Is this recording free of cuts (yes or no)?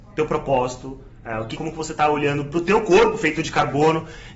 no